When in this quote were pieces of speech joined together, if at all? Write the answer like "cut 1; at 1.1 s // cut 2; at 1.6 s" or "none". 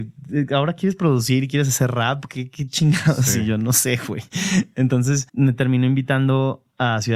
none